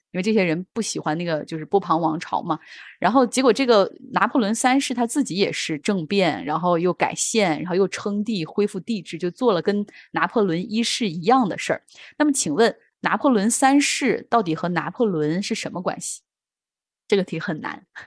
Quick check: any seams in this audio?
no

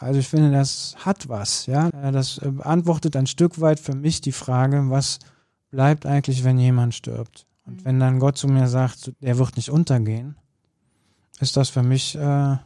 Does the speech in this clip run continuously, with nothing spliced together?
no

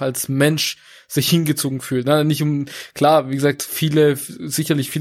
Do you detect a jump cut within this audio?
no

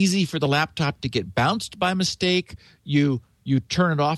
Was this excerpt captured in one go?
yes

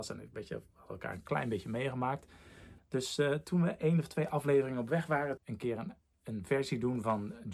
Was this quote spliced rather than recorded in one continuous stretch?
yes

